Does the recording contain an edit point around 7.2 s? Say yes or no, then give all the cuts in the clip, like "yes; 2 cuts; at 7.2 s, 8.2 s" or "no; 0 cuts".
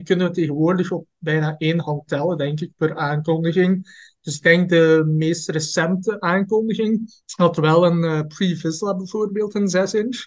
yes; 1 cut; at 7.2 s